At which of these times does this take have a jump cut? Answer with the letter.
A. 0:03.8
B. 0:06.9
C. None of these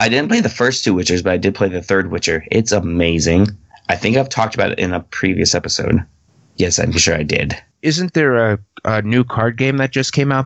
B